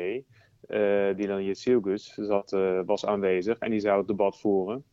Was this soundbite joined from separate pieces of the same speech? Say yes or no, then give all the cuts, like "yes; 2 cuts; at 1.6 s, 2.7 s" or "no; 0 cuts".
no; 0 cuts